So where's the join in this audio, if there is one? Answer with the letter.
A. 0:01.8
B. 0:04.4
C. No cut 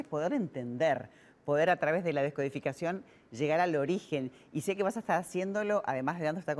C